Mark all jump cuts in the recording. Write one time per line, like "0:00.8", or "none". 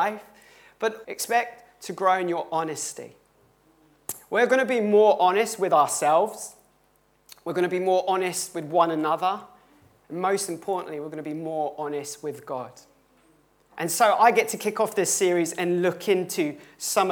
0:01.0

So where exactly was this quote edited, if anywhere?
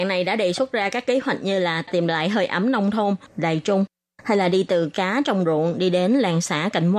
0:03.3

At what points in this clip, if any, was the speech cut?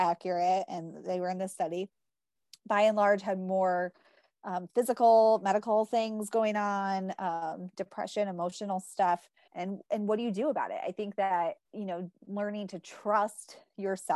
0:09.5
0:11.6

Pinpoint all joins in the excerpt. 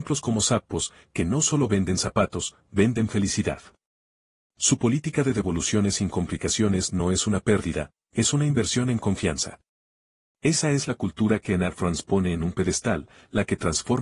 none

